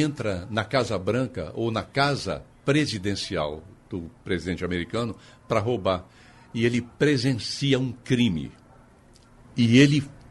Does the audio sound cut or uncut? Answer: uncut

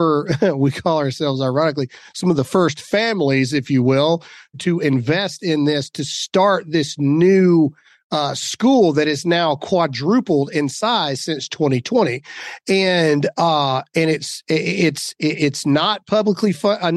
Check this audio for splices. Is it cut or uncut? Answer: cut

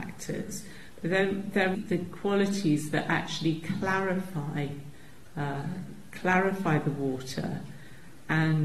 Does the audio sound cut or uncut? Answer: cut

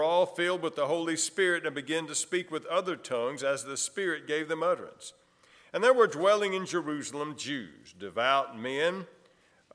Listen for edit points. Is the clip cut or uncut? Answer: uncut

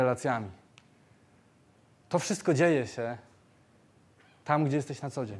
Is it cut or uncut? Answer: uncut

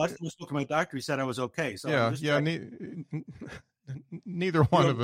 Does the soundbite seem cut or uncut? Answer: uncut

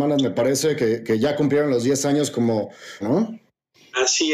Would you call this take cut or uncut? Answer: cut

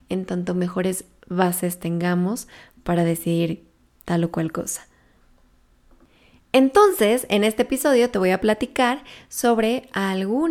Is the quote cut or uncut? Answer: uncut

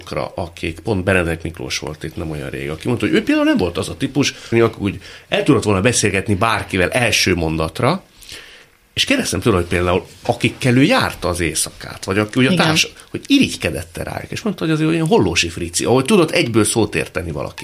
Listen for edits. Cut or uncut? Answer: cut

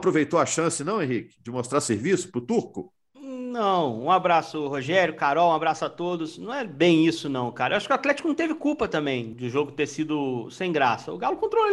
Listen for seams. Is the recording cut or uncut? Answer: cut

